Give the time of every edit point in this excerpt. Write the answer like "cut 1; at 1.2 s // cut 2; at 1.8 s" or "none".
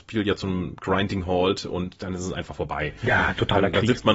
none